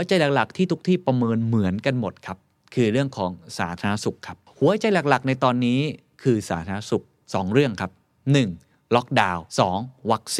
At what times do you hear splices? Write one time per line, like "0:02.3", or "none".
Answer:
0:09.5

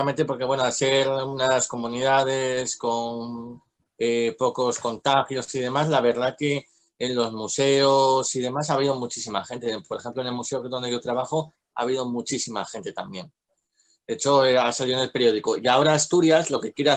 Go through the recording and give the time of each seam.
none

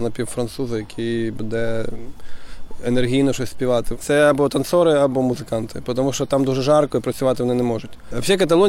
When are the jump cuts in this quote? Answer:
0:03.9

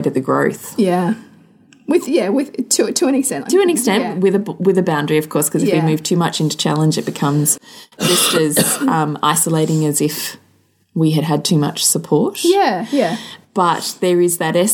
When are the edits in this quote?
none

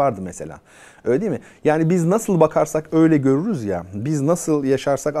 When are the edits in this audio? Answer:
none

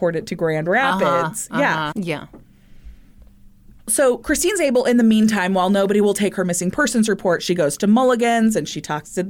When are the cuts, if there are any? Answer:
0:01.9

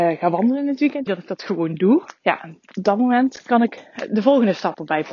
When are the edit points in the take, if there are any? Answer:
0:01.1
0:02.2

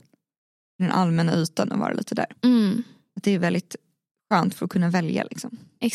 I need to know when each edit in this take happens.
none

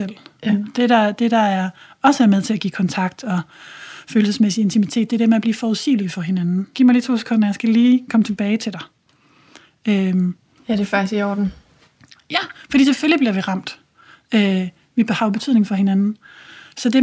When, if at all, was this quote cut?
0:06.7

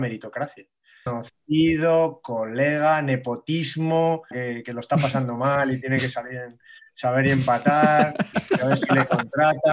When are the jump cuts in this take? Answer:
0:01.1
0:04.3

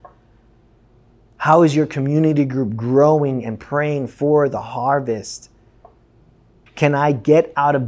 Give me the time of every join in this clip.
0:06.7

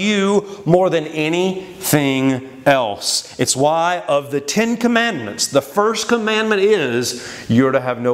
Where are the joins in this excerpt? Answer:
none

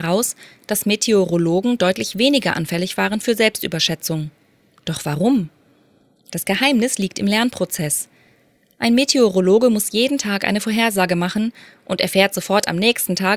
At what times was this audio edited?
none

